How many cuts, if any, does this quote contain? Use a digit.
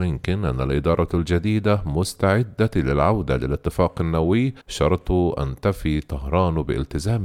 1